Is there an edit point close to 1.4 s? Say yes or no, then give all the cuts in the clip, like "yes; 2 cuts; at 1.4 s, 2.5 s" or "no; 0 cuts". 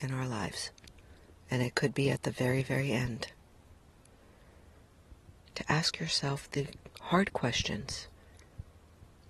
no; 1 cut; at 5.5 s